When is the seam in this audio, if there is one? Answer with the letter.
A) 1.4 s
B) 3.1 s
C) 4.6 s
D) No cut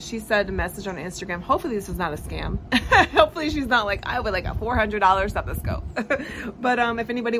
D